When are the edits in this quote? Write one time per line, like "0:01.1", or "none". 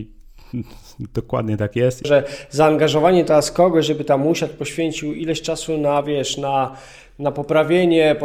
0:02.0